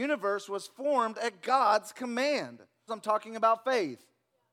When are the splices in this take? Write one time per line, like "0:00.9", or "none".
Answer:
0:02.9